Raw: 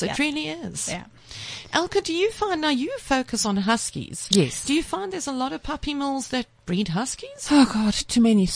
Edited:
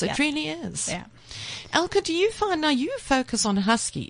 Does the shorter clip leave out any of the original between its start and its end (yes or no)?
no